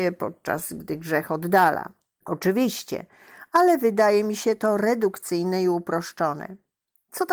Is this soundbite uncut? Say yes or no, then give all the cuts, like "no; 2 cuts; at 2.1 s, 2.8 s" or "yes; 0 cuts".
yes; 0 cuts